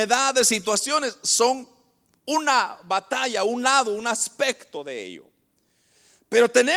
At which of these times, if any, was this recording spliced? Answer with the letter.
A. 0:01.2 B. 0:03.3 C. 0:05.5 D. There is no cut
D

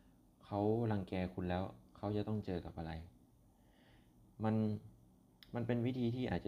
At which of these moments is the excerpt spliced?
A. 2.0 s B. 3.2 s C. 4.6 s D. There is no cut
D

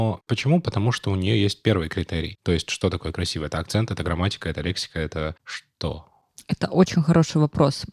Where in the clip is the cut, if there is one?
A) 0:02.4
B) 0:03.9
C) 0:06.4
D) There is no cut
A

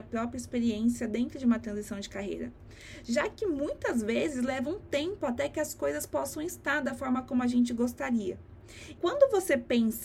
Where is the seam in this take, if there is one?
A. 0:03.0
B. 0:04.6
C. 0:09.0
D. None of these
C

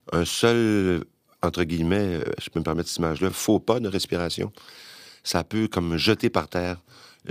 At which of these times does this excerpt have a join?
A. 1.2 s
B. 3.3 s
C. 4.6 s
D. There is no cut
D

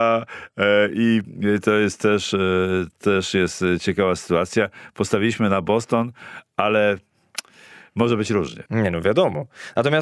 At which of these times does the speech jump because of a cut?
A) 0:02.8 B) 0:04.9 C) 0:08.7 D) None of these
C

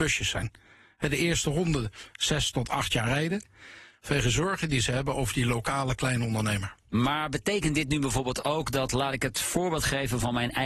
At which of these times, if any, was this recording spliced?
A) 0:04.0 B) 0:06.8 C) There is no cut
A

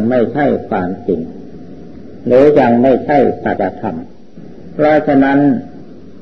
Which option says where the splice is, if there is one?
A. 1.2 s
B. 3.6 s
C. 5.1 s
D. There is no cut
B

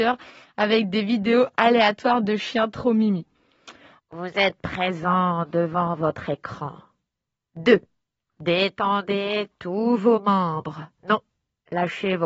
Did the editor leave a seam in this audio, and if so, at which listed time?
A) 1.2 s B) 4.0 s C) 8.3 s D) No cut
B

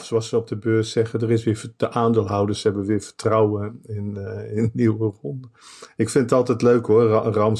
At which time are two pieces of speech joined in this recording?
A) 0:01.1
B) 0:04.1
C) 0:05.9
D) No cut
D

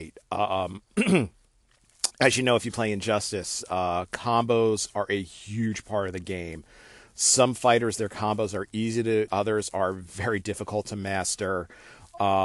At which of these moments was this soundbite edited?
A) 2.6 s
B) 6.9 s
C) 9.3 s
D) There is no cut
C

